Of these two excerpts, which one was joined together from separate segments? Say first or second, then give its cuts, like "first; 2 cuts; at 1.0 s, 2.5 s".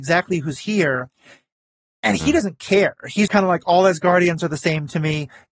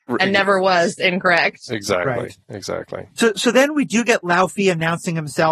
first; 1 cut; at 3.3 s